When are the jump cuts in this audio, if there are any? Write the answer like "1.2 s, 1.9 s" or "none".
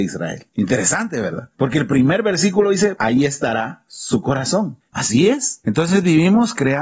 3.0 s, 4.9 s